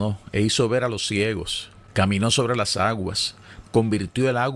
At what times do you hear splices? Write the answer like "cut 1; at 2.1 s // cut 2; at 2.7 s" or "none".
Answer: cut 1; at 3.6 s